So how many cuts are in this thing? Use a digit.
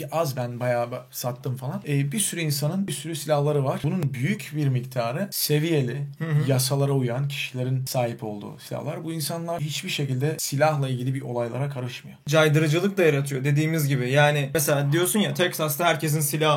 1